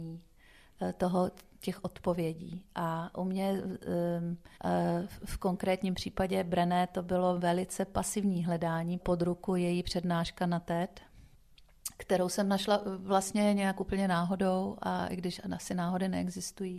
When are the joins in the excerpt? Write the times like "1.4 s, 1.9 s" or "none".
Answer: 4.6 s, 9.0 s